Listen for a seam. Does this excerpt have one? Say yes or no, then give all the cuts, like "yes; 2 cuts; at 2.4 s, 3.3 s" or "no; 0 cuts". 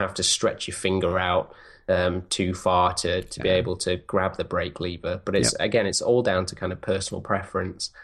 no; 0 cuts